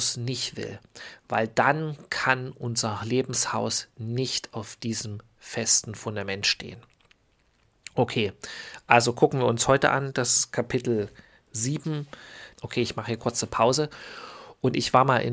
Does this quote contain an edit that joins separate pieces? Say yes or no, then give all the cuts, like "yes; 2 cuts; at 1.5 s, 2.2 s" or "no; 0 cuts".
yes; 1 cut; at 12.5 s